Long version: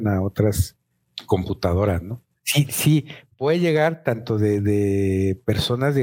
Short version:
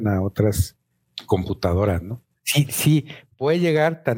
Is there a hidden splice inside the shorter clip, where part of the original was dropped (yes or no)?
no